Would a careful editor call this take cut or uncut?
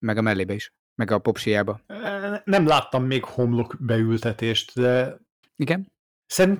cut